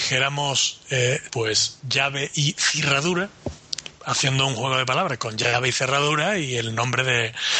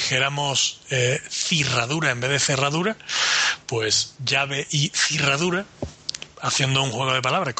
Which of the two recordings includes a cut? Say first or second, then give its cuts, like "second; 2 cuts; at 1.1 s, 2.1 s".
first; 1 cut; at 1.3 s